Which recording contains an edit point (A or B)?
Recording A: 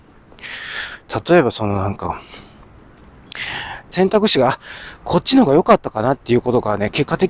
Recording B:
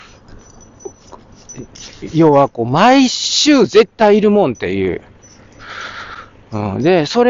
A